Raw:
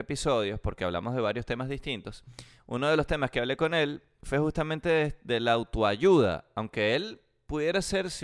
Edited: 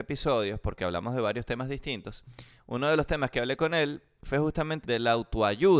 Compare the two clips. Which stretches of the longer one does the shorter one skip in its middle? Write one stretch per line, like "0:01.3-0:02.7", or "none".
0:04.8-0:05.2